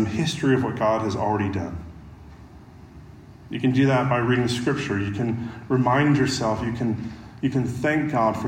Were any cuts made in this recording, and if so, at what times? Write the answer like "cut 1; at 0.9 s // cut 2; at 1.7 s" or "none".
none